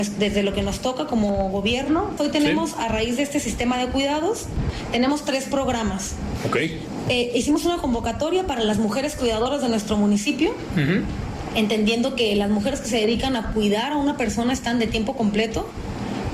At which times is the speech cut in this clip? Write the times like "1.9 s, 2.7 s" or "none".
2.2 s